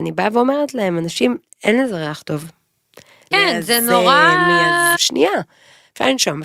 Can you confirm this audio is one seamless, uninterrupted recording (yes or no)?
no